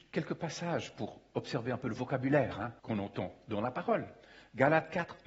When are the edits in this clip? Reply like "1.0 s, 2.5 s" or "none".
2.8 s